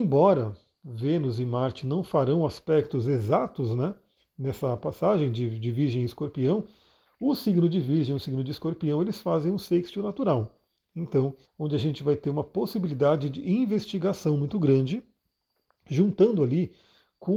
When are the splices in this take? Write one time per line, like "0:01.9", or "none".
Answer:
0:11.4